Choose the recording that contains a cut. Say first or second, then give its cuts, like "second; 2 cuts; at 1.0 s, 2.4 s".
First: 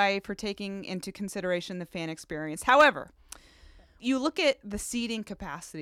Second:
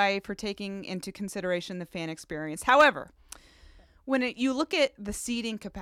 first; 1 cut; at 4.0 s